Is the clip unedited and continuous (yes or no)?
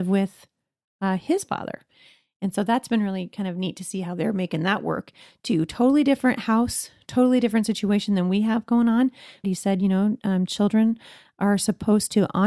no